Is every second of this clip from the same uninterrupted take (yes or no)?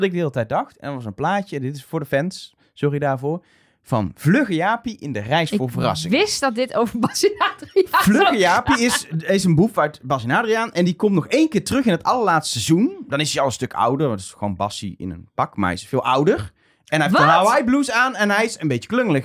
yes